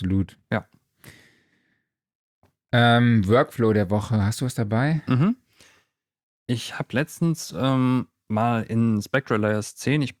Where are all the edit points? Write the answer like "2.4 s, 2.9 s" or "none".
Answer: none

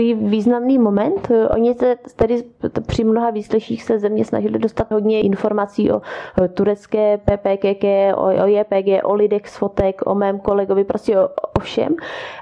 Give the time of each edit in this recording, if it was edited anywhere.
4.9 s

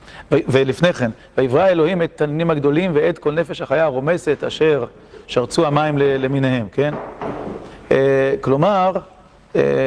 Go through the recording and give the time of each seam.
none

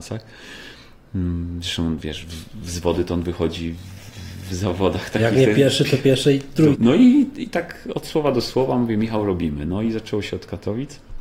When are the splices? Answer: 6.7 s

